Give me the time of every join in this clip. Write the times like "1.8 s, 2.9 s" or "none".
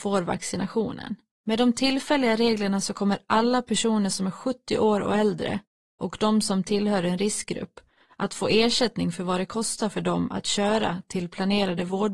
1.4 s